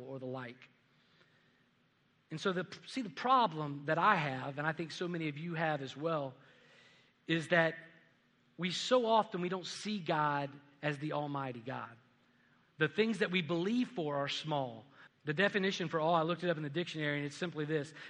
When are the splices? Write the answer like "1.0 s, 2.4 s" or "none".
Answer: 12.6 s, 15.1 s